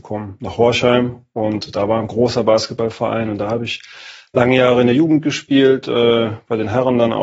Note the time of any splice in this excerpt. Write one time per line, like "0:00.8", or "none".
none